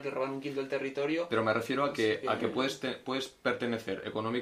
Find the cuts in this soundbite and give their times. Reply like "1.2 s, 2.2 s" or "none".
none